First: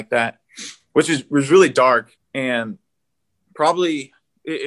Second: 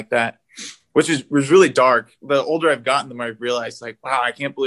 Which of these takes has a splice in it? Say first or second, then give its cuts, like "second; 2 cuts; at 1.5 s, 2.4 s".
first; 1 cut; at 2.2 s